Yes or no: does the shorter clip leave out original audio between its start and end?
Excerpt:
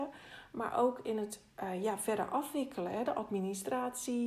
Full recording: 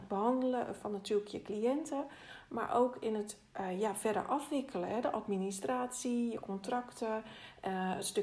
no